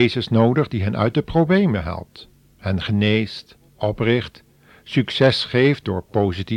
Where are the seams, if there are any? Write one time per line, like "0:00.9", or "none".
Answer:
none